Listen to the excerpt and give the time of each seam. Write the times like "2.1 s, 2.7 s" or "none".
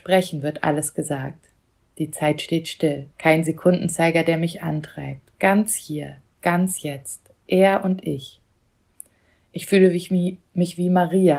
3.1 s